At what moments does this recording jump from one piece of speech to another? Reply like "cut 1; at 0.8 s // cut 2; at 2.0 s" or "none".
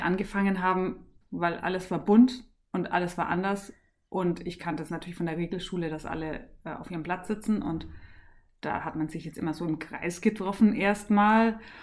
cut 1; at 1.2 s